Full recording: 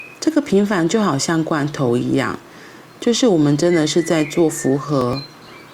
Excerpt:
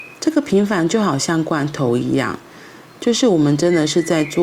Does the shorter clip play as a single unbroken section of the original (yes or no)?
yes